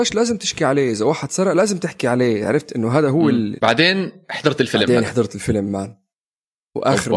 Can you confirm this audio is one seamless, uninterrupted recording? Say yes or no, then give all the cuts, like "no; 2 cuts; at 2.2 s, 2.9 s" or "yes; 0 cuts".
no; 1 cut; at 3.6 s